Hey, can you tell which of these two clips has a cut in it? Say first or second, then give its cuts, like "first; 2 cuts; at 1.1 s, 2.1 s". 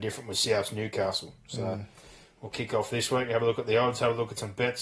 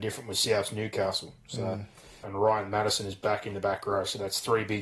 second; 1 cut; at 2.2 s